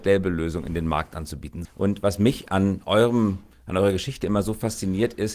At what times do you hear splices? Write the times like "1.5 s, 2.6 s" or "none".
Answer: 1.6 s

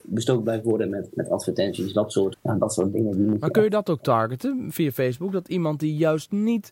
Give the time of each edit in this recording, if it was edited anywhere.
2.3 s

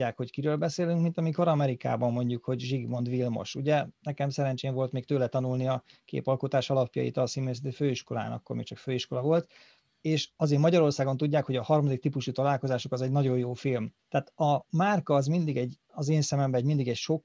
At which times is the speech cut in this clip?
14.0 s

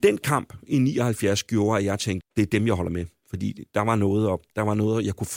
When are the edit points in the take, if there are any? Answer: 2.2 s

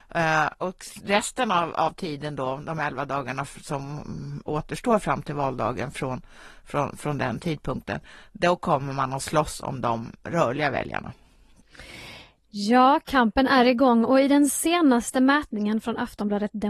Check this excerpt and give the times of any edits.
none

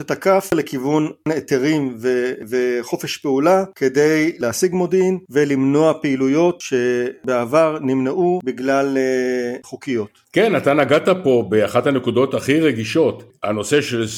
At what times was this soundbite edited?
9.6 s

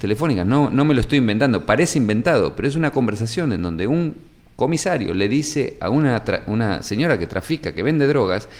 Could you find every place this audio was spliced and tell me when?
none

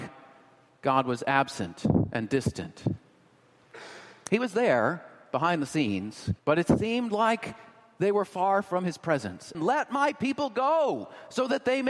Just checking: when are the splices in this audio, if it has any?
6.4 s, 9.5 s

